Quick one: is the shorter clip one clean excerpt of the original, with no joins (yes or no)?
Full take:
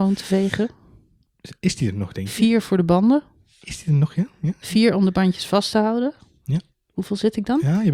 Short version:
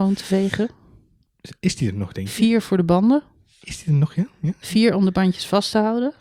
yes